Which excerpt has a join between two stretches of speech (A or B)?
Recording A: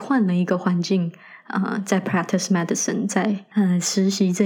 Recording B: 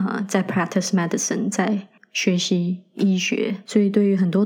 A